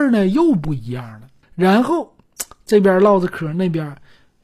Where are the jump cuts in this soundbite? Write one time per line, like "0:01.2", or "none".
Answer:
0:01.4